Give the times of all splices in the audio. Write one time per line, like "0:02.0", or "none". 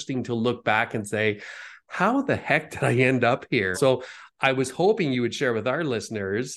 0:03.7